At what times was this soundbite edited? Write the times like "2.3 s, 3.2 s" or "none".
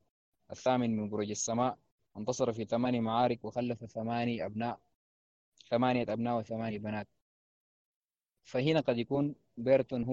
none